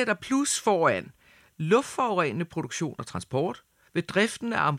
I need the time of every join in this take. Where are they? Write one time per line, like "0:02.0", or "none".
0:03.9